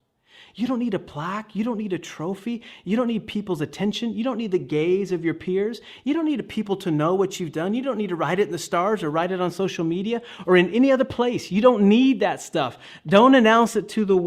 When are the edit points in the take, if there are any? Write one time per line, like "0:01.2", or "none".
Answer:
none